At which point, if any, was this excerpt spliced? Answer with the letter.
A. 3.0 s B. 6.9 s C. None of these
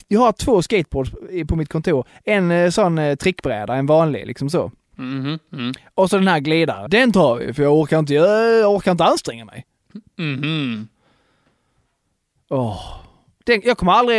B